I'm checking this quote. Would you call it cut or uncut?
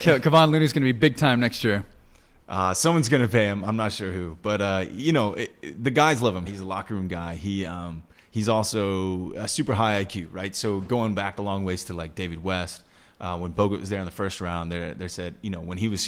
cut